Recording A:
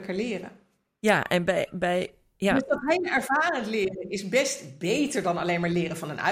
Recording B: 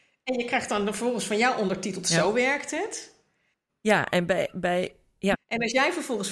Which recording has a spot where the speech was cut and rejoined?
B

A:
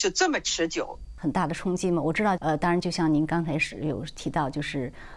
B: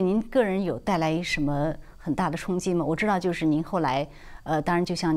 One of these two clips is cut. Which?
A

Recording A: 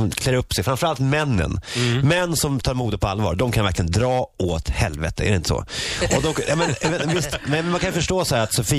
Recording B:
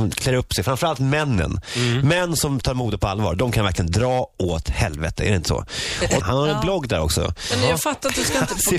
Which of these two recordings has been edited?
B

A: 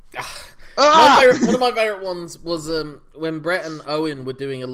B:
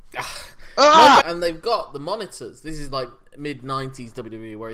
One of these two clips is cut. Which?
B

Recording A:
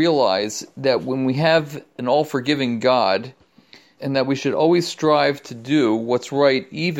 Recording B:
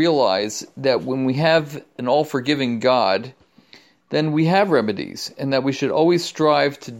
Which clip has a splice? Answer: A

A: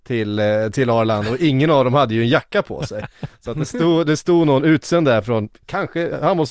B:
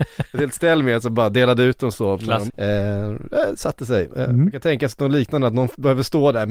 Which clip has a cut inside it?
B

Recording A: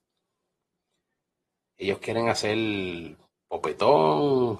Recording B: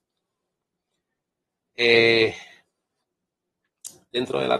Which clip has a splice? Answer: B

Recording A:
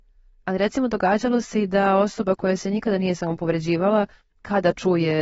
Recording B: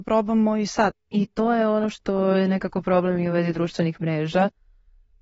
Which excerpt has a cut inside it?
B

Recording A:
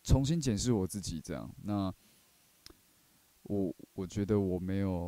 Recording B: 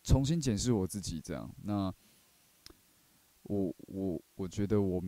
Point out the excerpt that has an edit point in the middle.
A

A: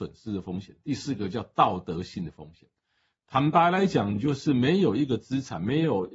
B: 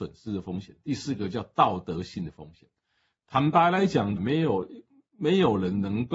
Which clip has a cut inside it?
B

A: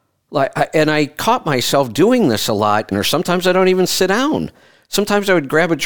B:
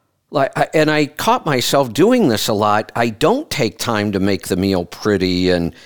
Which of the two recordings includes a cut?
A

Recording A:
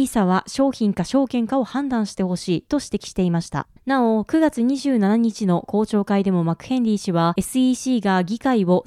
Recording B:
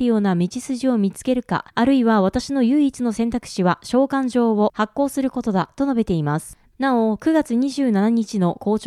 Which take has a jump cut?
B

